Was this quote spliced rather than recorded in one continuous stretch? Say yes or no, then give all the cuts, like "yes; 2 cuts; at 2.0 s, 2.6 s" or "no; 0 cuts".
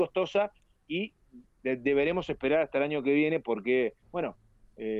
yes; 1 cut; at 4.0 s